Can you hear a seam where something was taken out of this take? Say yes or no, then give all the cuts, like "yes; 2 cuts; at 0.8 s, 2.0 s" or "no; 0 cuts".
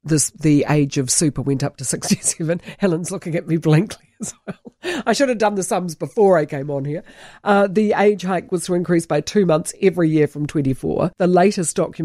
yes; 1 cut; at 11.1 s